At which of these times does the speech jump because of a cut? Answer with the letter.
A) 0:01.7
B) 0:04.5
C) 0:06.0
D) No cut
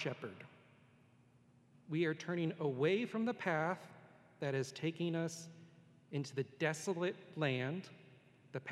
A